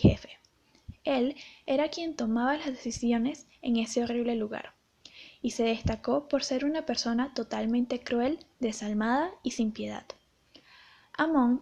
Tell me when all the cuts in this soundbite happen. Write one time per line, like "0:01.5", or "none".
none